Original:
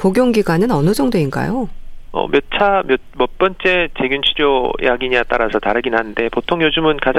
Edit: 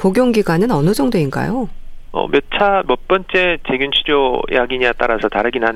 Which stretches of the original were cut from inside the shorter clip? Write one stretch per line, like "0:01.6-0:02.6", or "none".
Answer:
0:02.8-0:03.1